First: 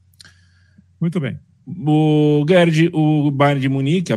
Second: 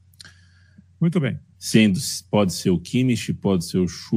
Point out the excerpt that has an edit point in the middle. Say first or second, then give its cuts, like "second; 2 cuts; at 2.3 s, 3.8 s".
second; 1 cut; at 1.5 s